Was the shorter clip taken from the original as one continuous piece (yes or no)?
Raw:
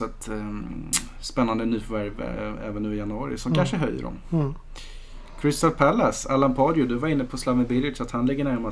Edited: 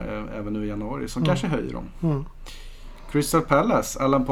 yes